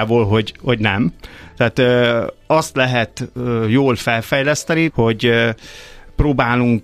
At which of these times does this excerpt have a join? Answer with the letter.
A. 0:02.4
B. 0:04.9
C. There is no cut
B